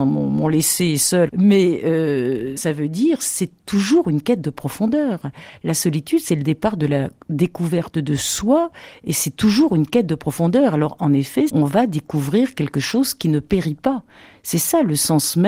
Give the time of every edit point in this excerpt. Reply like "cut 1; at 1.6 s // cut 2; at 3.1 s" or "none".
cut 1; at 1.3 s // cut 2; at 2.6 s // cut 3; at 11.5 s